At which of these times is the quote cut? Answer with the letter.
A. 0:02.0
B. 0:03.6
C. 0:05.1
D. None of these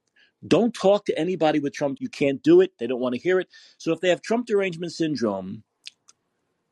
A